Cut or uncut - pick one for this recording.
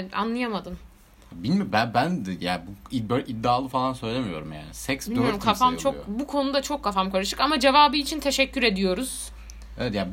uncut